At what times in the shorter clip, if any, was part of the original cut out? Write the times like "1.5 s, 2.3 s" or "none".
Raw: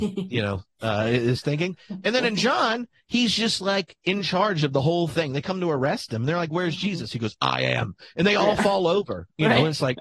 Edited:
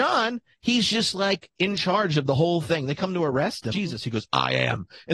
3.7 s